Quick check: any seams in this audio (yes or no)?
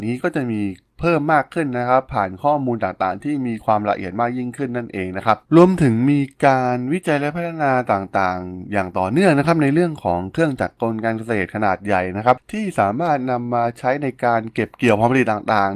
yes